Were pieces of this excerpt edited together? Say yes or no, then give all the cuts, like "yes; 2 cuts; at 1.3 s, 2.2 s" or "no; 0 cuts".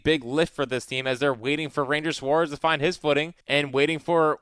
yes; 1 cut; at 3.4 s